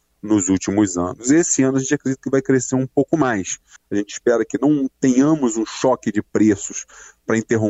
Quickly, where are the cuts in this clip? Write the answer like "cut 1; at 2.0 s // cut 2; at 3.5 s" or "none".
cut 1; at 3.8 s